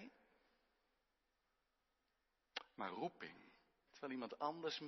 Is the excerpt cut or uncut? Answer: cut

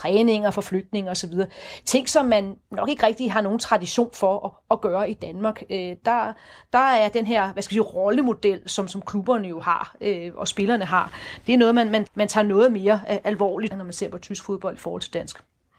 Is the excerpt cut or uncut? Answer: cut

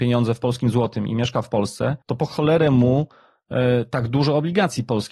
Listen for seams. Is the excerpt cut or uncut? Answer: cut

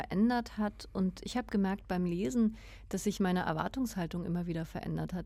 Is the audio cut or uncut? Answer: uncut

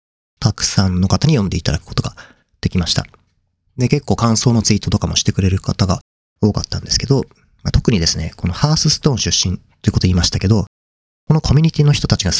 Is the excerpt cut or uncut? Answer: uncut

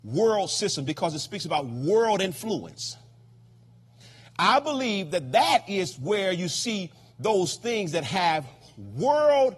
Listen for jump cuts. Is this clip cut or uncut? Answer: uncut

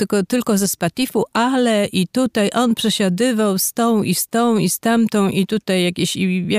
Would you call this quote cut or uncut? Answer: uncut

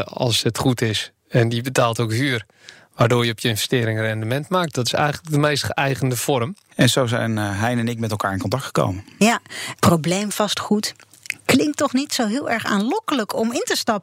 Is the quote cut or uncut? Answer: cut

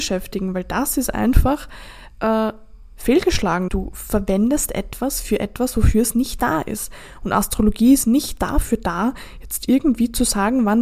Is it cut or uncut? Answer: cut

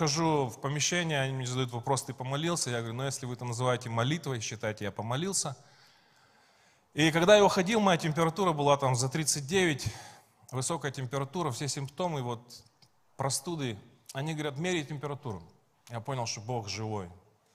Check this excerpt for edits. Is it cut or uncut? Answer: cut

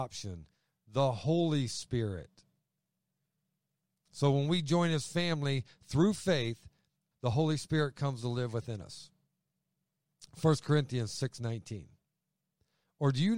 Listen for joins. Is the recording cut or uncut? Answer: cut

